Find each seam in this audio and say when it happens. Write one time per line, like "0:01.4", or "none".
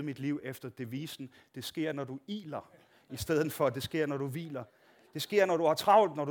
none